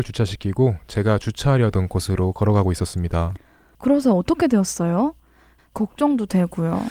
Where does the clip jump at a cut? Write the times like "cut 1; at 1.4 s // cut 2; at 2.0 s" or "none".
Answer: cut 1; at 5.6 s